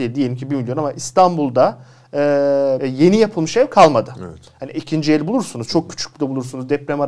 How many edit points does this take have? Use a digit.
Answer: 1